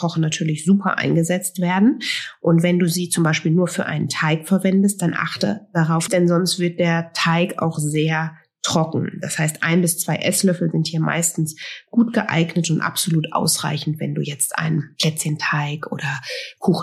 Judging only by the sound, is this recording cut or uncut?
cut